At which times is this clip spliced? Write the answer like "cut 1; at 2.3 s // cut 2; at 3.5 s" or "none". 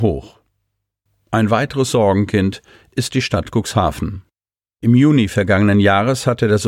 none